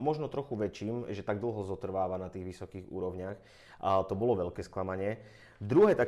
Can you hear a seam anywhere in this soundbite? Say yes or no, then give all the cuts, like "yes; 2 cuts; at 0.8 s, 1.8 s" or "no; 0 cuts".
yes; 1 cut; at 3.8 s